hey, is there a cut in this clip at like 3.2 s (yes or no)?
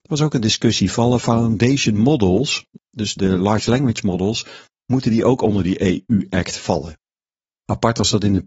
yes